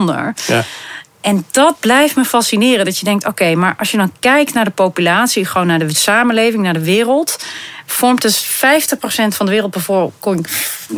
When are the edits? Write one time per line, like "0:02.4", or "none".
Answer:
none